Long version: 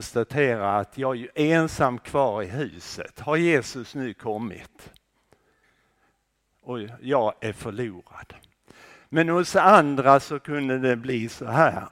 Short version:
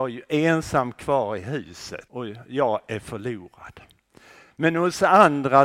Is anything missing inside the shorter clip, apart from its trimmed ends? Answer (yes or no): yes